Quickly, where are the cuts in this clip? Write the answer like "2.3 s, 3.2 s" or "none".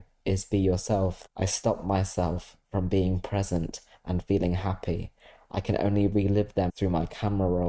1.3 s, 6.7 s